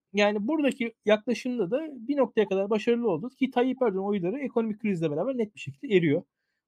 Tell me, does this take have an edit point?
no; 0 cuts

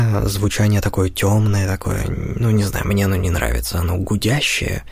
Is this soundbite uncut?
yes; 0 cuts

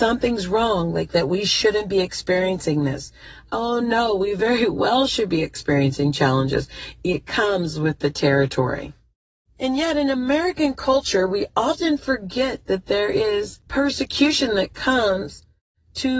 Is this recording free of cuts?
no; 1 cut; at 9.5 s

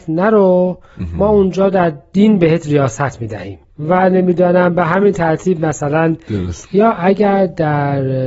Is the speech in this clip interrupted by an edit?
yes; 1 cut; at 6.6 s

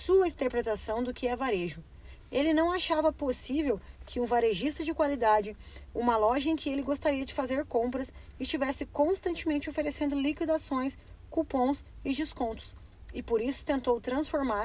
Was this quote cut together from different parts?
no; 0 cuts

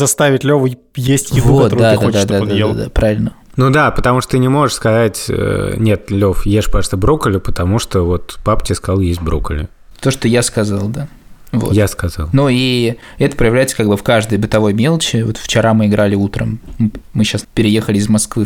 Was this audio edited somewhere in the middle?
no; 0 cuts

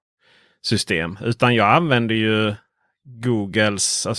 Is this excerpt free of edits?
yes; 0 cuts

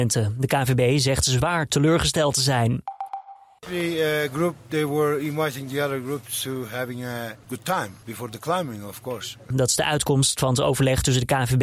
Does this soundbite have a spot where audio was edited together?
yes; 2 cuts; at 3.6 s, 9.5 s

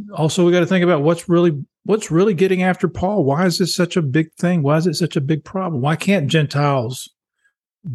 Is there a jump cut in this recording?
no; 0 cuts

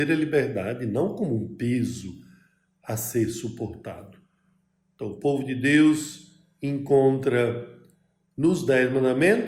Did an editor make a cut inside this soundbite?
no; 0 cuts

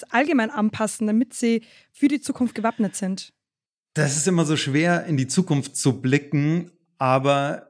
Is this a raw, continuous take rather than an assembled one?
yes; 0 cuts

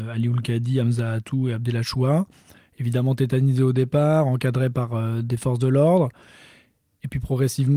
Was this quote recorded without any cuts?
yes; 0 cuts

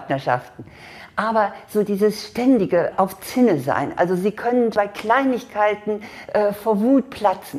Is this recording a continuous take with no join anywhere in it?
no; 1 cut; at 4.7 s

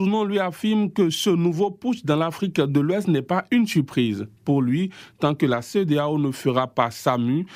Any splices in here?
no; 0 cuts

